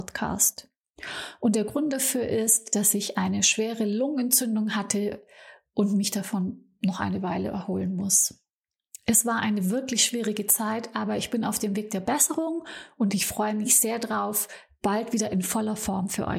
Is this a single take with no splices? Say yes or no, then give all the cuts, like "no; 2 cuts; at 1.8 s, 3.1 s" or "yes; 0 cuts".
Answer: yes; 0 cuts